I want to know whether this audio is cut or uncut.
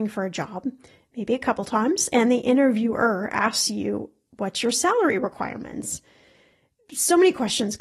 uncut